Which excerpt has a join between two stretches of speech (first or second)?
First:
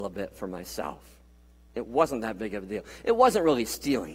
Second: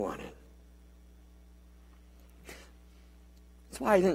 first